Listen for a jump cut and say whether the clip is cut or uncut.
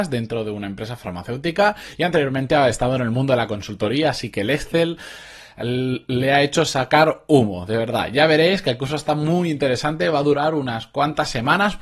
uncut